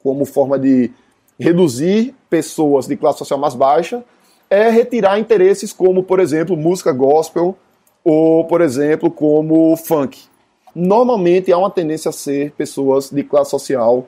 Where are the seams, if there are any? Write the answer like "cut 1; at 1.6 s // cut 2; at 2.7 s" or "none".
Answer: cut 1; at 10.7 s